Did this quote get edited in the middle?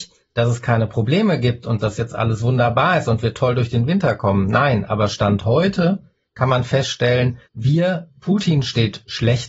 yes; 1 cut; at 7.5 s

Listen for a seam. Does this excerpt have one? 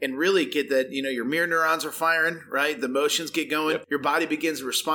no; 0 cuts

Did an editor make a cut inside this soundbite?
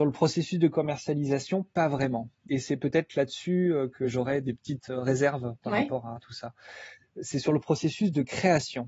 no; 0 cuts

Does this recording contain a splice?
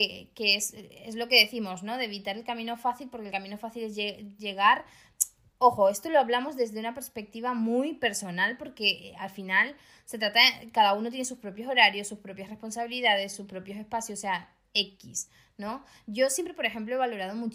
no; 0 cuts

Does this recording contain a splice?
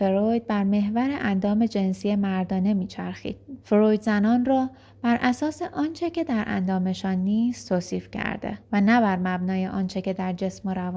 yes; 2 cuts; at 3.6 s, 8.6 s

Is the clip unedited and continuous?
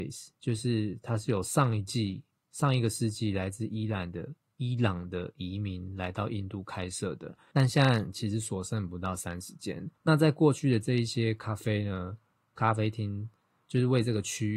no; 2 cuts; at 7.5 s, 10.0 s

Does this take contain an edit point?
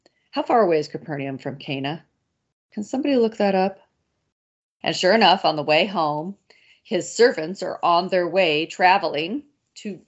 yes; 1 cut; at 4.8 s

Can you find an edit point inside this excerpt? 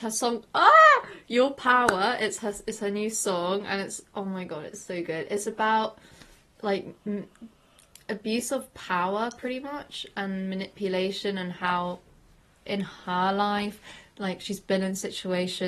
no; 0 cuts

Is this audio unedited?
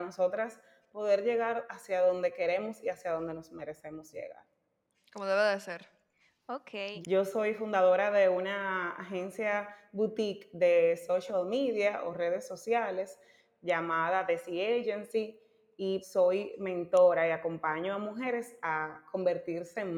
no; 2 cuts; at 7.0 s, 16.0 s

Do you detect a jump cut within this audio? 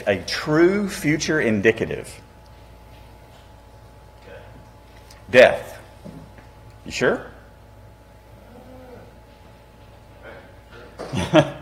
no; 0 cuts

